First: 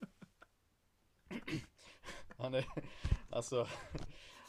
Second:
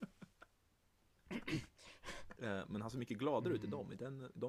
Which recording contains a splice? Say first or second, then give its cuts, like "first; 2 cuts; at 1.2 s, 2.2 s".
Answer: second; 1 cut; at 2.4 s